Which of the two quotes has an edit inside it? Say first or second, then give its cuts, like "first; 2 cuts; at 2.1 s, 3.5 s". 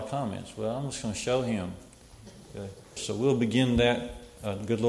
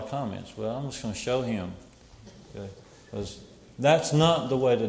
first; 1 cut; at 3.0 s